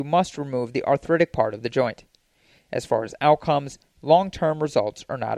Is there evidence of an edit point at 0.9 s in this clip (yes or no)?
no